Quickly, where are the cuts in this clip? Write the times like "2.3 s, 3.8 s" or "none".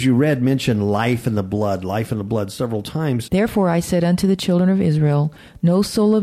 3.3 s